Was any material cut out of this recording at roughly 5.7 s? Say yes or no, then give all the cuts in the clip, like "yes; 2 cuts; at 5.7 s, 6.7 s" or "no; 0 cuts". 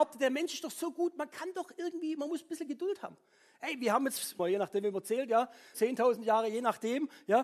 yes; 2 cuts; at 4.4 s, 5.7 s